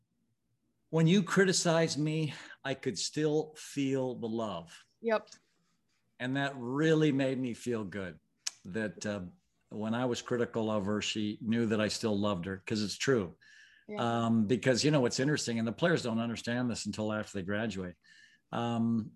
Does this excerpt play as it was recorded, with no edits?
yes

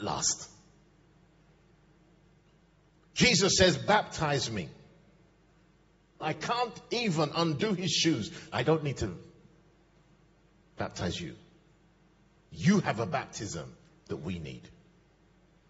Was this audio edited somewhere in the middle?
yes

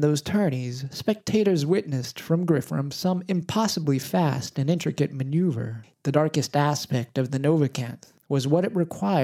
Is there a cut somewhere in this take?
yes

